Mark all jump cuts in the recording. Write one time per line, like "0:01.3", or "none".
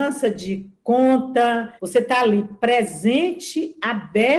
0:01.8

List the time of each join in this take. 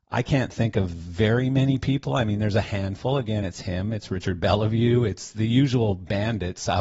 none

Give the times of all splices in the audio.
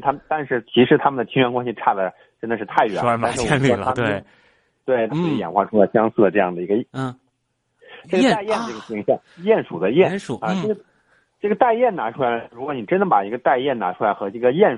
0:05.1
0:06.9

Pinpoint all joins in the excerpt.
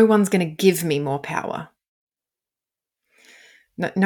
none

